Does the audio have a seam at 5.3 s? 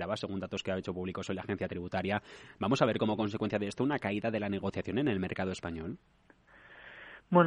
no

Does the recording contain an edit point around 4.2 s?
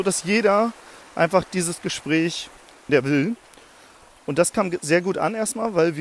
no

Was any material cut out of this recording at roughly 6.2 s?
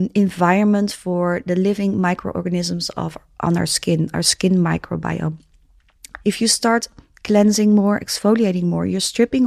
yes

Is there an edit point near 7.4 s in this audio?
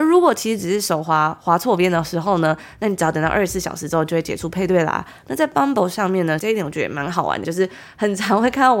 yes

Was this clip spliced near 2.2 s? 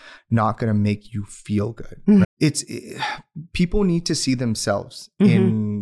yes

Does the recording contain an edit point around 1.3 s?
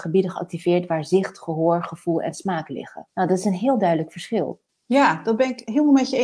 no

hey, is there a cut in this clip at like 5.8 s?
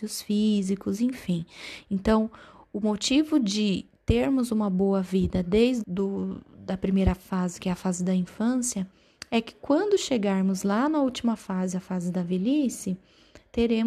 yes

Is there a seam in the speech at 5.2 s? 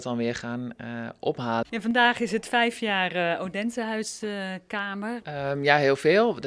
yes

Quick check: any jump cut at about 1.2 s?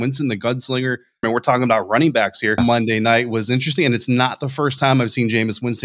yes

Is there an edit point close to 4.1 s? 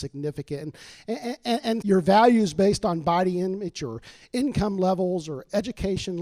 no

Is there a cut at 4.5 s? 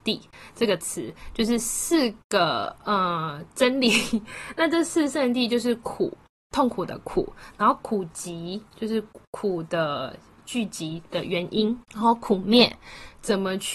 no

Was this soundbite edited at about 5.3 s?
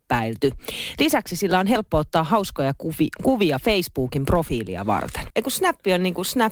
yes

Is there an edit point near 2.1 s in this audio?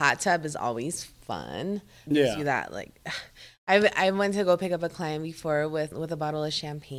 yes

